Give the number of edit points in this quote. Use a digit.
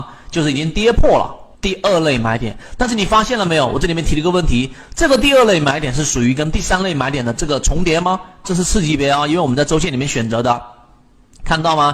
2